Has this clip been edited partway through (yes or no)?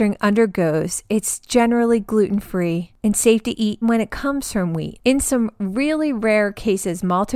yes